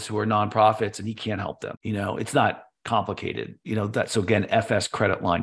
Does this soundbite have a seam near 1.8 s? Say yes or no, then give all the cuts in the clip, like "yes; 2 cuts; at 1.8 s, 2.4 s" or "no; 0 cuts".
yes; 1 cut; at 1.8 s